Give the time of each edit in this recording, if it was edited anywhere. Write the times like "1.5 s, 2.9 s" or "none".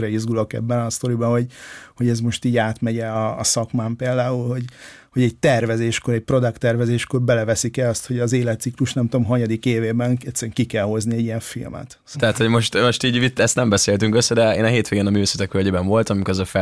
12.1 s

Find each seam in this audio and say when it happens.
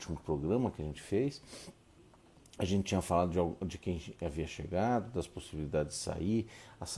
none

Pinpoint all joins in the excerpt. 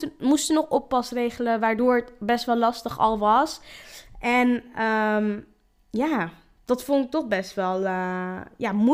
none

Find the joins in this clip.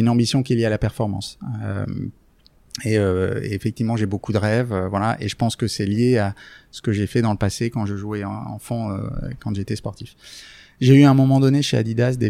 none

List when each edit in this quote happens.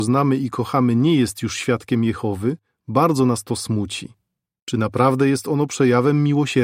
4.6 s

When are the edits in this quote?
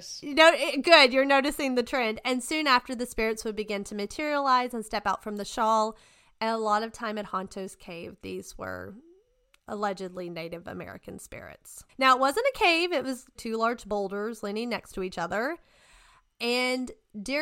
11.9 s, 13.4 s

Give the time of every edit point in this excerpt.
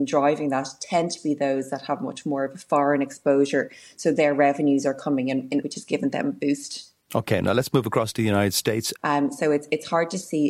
5.6 s, 7.0 s, 9.0 s

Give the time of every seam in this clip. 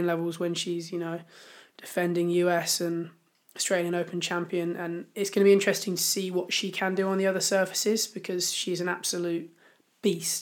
none

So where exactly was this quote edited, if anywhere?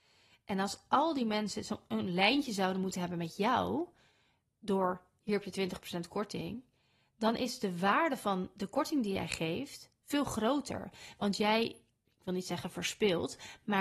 none

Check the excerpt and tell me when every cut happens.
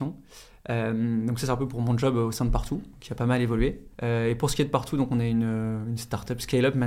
3.9 s

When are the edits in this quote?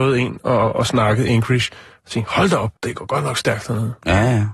2.8 s

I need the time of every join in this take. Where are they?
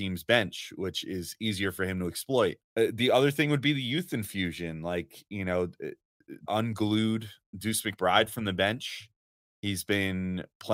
6.5 s

